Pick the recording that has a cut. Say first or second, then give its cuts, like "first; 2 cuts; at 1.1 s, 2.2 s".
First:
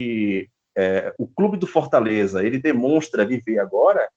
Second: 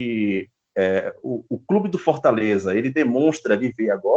first; 1 cut; at 1.2 s